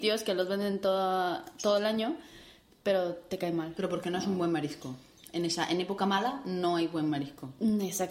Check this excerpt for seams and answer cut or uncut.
uncut